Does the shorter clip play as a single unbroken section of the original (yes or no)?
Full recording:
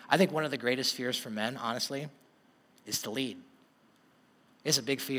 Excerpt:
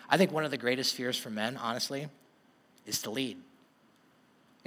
yes